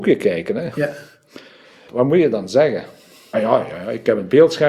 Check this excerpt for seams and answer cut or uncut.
cut